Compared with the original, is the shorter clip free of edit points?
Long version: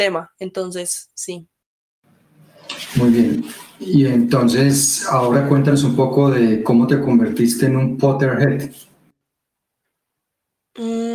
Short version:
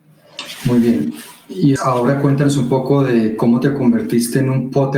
no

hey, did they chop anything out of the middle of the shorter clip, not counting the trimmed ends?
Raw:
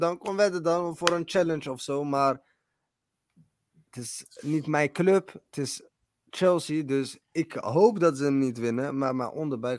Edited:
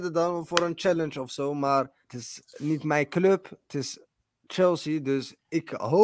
yes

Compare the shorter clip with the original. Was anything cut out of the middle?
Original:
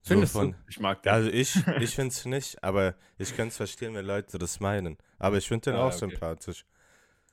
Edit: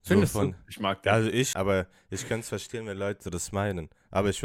yes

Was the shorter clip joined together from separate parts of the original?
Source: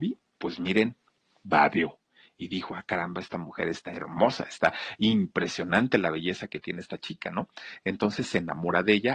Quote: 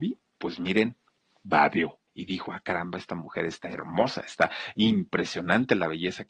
yes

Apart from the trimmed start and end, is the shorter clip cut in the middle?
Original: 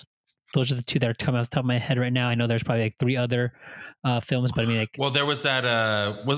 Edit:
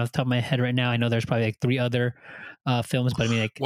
no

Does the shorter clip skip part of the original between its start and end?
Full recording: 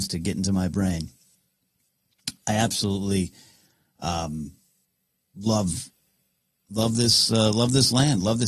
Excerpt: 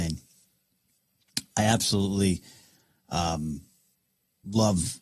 no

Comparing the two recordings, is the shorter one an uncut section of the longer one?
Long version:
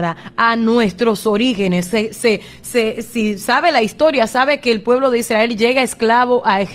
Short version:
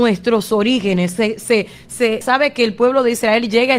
no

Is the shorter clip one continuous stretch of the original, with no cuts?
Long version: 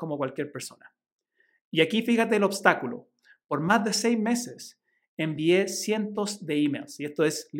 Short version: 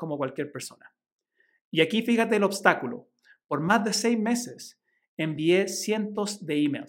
yes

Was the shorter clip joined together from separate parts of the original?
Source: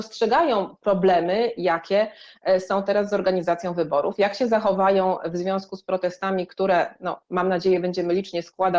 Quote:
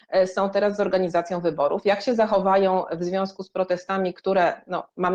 no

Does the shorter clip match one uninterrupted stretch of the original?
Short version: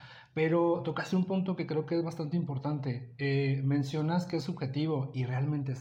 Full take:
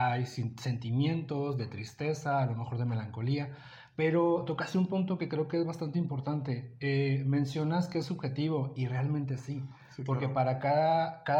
yes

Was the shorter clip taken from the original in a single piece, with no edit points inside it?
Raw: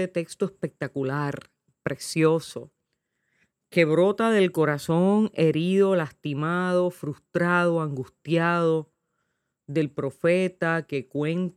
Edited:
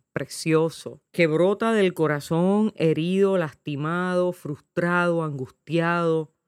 no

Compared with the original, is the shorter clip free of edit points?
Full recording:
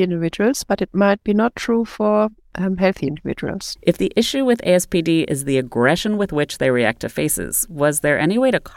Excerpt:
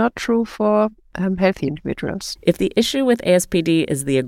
yes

